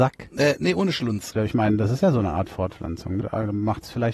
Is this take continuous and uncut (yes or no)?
no